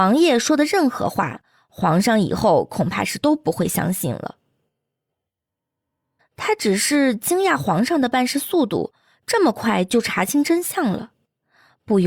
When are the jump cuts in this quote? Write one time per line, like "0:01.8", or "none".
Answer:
0:06.2